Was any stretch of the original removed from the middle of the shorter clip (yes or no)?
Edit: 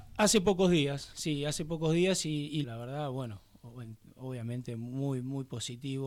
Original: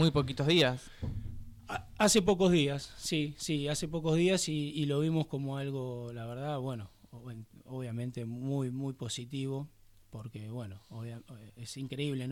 yes